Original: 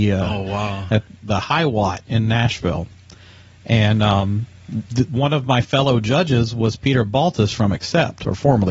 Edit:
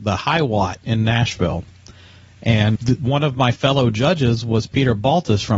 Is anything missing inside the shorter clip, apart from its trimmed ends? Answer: yes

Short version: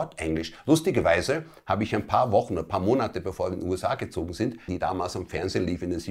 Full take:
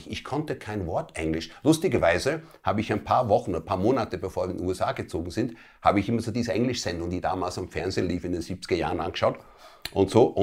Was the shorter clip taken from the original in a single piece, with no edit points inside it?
no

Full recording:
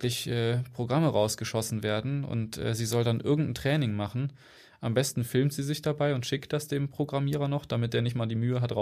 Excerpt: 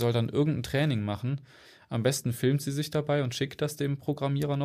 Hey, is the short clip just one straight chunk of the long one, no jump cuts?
yes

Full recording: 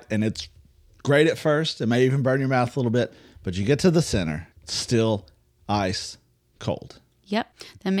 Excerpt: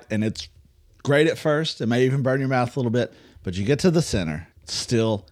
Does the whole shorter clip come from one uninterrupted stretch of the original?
yes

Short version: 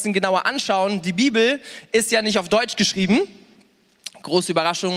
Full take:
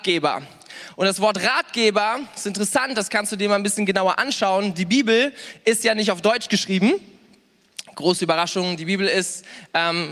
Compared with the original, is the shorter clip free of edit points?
yes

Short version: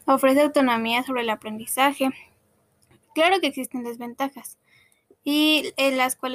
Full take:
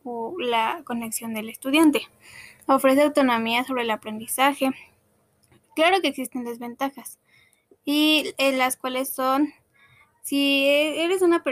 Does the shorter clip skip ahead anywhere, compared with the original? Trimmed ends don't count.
no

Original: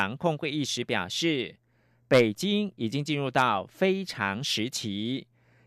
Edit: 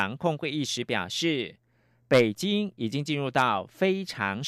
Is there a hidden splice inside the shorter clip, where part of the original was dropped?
no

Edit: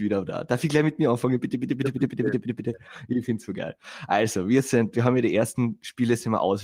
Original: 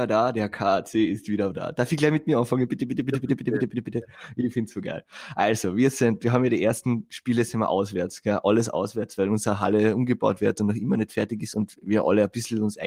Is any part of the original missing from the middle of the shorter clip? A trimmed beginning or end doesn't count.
no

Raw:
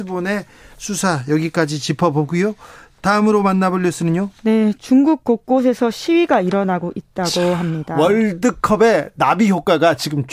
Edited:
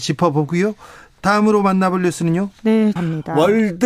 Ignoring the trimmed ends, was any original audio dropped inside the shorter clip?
yes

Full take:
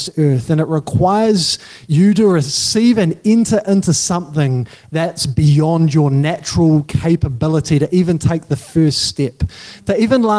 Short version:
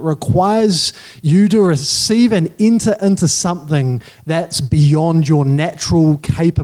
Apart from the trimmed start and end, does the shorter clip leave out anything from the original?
no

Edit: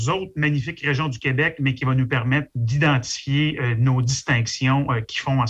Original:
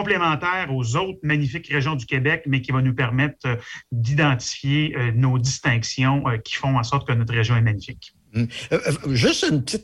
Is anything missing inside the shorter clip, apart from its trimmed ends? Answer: yes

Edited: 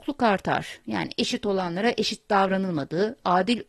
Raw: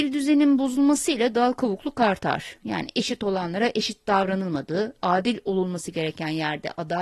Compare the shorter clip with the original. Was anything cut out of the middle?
no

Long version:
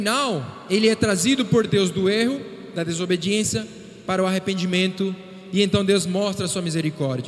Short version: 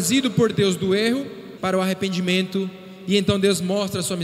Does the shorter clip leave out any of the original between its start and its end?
yes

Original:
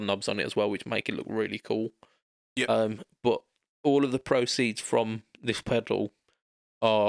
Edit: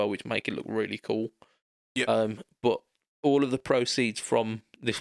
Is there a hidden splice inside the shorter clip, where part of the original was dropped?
no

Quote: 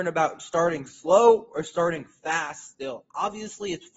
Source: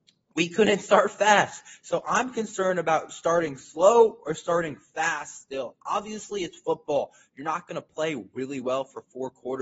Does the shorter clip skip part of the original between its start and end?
no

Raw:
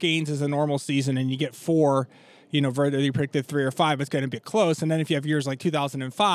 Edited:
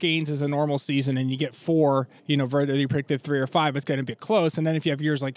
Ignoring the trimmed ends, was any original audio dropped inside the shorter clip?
yes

